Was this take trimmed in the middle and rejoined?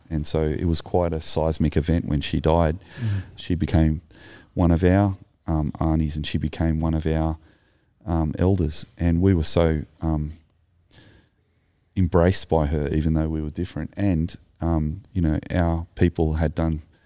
yes; 1 cut; at 3.4 s

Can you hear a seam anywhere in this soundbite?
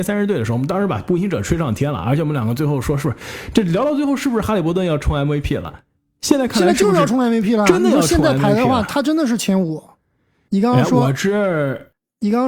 yes; 1 cut; at 10.5 s

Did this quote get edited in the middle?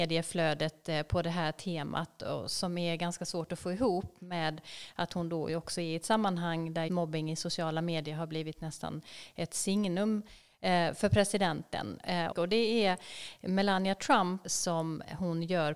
yes; 3 cuts; at 6.9 s, 12.3 s, 14.4 s

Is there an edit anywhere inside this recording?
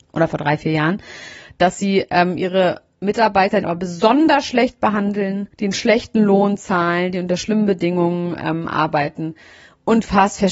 yes; 2 cuts; at 3.6 s, 5.5 s

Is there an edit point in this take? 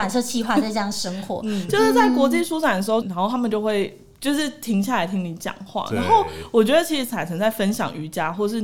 yes; 2 cuts; at 1.7 s, 3.0 s

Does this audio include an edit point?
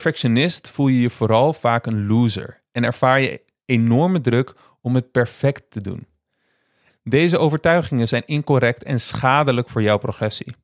yes; 1 cut; at 6.9 s

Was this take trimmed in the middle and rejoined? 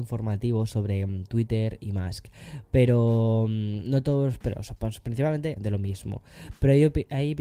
yes; 1 cut; at 5.6 s

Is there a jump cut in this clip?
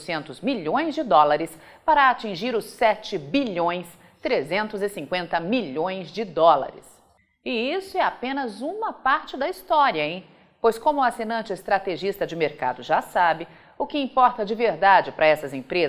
no; 0 cuts

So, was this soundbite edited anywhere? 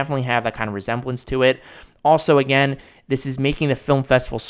no; 0 cuts

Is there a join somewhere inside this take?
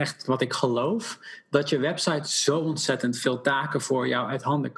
no; 0 cuts

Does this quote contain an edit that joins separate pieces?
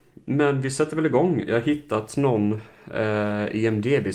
no; 0 cuts

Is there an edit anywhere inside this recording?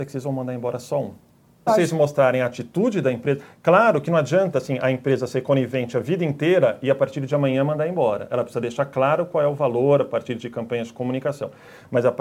yes; 1 cut; at 1.7 s

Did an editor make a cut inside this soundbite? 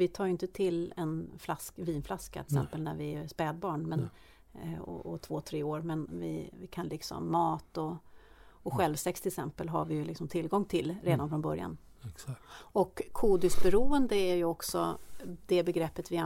no; 0 cuts

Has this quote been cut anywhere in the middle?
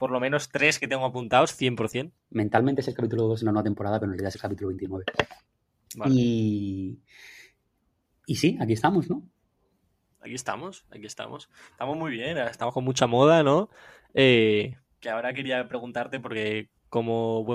yes; 1 cut; at 2.2 s

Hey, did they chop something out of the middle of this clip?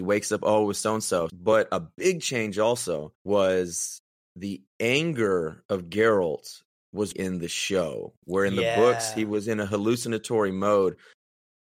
yes; 3 cuts; at 1.3 s, 3.1 s, 7.1 s

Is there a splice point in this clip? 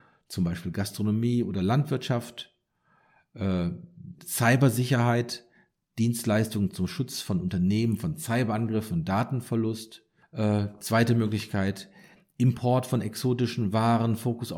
yes; 2 cuts; at 4.2 s, 10.2 s

